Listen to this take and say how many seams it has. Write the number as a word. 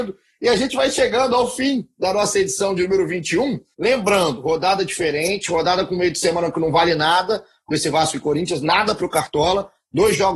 one